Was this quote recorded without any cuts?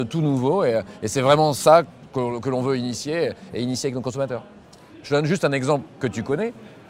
no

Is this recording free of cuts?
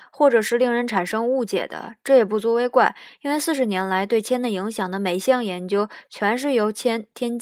yes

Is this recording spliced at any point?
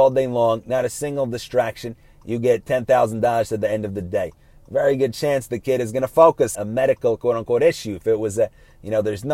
yes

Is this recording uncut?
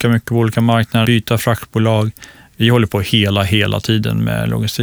no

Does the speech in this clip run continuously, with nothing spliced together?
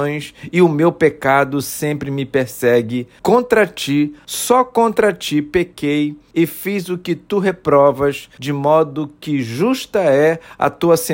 yes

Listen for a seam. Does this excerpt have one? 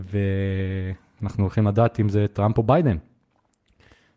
no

